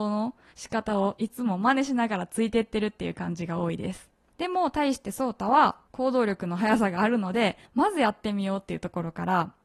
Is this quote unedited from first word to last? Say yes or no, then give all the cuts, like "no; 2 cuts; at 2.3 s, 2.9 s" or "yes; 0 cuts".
no; 1 cut; at 4.3 s